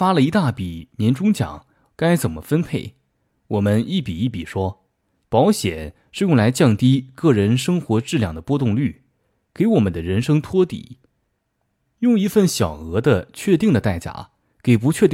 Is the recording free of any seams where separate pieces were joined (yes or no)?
no